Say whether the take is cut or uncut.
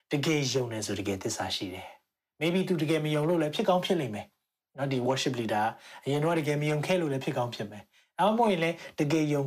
uncut